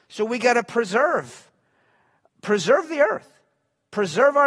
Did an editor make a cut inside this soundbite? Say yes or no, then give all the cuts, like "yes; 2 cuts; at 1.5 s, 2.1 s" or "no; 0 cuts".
no; 0 cuts